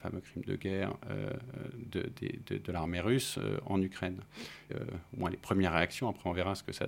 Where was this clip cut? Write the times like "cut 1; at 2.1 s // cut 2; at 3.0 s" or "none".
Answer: cut 1; at 4.7 s